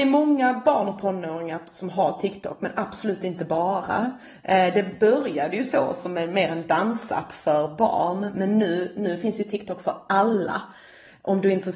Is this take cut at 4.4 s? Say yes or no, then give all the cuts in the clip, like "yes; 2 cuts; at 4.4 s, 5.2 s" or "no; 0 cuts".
no; 0 cuts